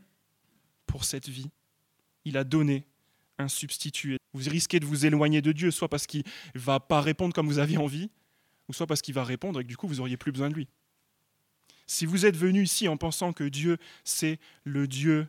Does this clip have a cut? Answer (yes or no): yes